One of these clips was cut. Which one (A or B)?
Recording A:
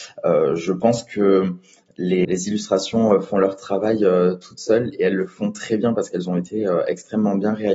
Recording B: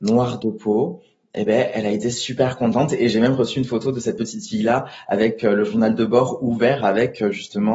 A